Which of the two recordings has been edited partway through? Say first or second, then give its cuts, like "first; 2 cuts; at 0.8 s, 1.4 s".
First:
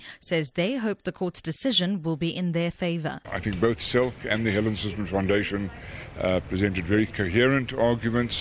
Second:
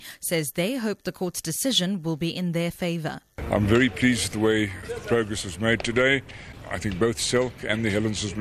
first; 1 cut; at 3.2 s